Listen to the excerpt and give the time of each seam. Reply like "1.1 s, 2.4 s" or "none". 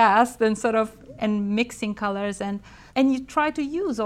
2.9 s